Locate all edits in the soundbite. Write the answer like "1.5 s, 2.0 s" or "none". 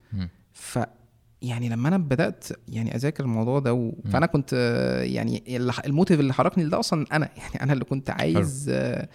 4.0 s